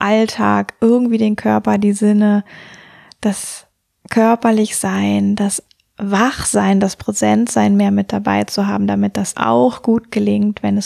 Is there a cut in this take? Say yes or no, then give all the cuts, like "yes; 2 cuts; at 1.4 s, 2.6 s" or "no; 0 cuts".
yes; 1 cut; at 9.3 s